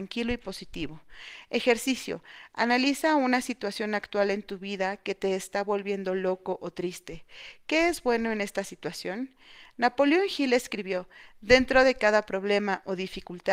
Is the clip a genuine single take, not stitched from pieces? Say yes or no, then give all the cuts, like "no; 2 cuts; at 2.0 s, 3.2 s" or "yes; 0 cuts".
yes; 0 cuts